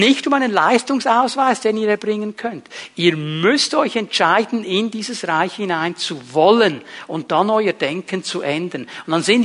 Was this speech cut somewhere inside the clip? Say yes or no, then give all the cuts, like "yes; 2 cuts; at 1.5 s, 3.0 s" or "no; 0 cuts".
no; 0 cuts